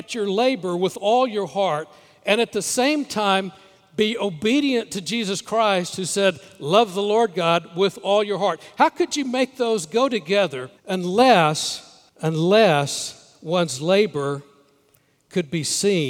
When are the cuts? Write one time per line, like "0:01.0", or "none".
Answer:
0:10.8
0:12.1